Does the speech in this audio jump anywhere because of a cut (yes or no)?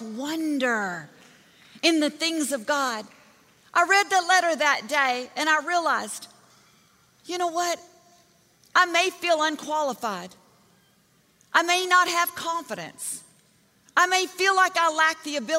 no